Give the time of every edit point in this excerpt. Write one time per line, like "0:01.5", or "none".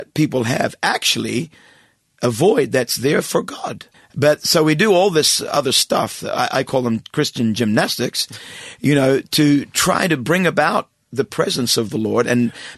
0:03.9